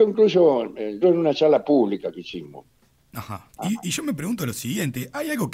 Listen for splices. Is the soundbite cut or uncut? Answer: cut